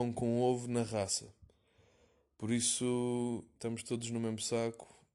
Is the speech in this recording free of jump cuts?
no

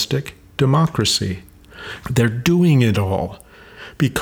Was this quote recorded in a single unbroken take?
no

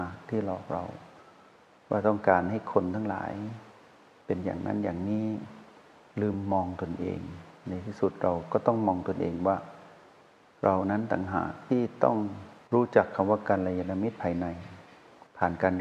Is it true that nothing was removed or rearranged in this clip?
yes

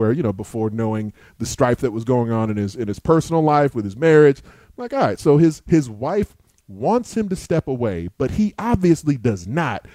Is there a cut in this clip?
no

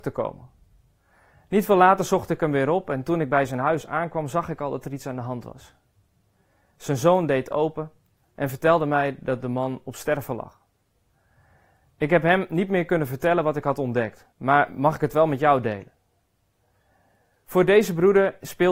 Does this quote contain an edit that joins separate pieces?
yes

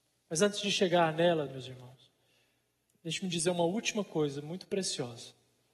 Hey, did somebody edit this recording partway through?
no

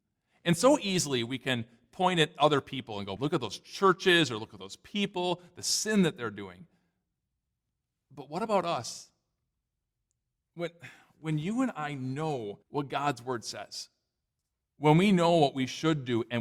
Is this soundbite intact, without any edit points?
no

